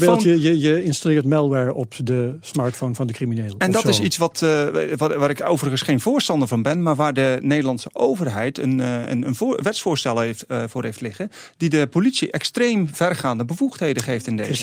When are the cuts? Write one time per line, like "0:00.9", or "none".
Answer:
none